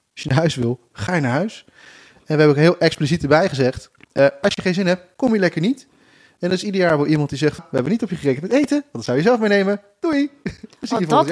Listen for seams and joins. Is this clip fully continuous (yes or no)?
no